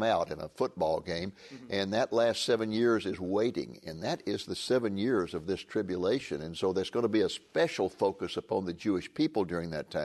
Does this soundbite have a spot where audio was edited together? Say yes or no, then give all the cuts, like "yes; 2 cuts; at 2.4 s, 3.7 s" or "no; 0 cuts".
no; 0 cuts